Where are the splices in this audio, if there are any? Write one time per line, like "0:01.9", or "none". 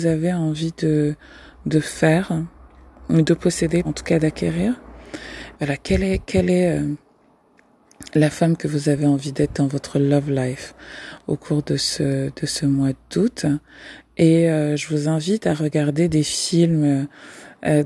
0:03.8
0:05.5